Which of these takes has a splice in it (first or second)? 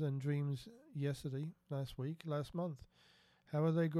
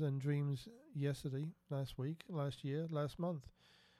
first